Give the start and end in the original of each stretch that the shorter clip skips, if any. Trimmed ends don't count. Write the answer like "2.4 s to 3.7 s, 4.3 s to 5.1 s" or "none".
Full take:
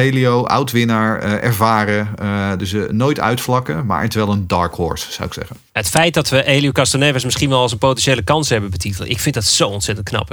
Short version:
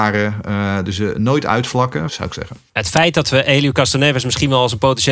3.8 s to 5.1 s